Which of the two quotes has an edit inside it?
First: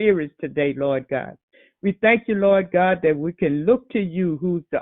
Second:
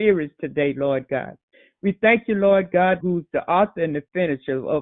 second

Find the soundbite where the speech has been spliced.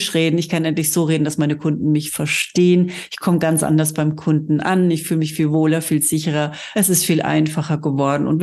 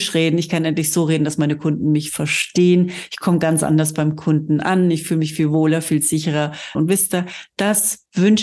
second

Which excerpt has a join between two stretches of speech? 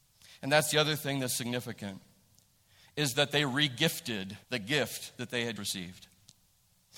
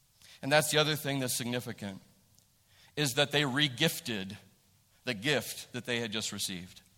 first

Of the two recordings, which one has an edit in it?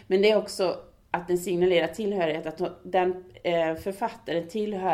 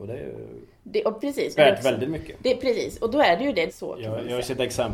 second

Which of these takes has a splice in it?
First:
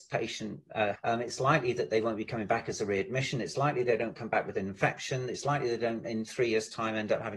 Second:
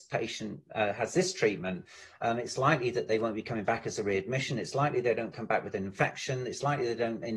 first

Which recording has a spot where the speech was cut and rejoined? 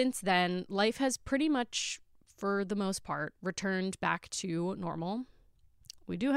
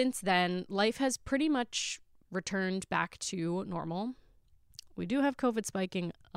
second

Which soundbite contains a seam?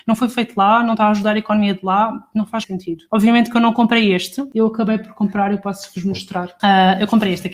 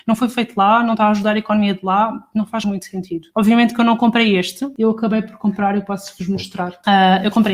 first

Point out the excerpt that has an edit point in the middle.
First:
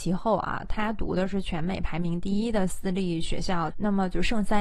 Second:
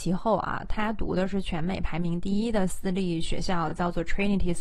first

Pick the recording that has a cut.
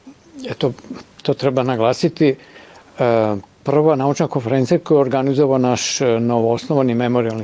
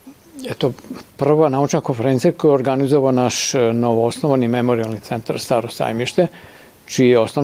second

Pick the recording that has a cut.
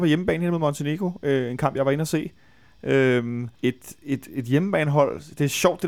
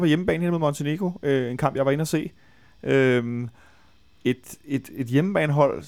first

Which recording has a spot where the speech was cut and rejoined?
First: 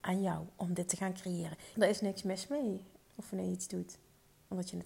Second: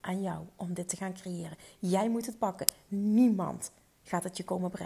first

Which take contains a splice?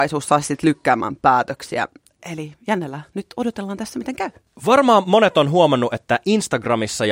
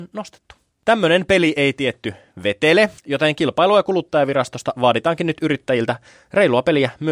second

